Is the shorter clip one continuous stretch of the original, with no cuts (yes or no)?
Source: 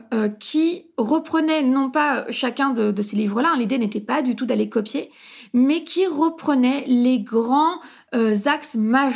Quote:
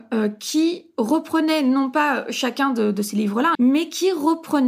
no